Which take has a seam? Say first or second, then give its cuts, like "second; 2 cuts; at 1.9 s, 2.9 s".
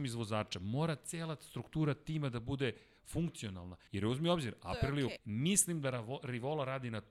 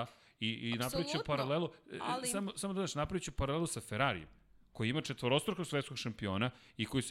first; 2 cuts; at 3.9 s, 5.2 s